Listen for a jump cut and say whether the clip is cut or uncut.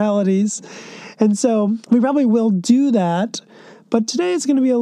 cut